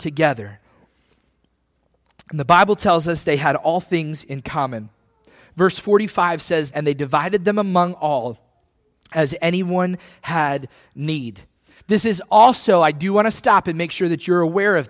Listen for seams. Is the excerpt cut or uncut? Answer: cut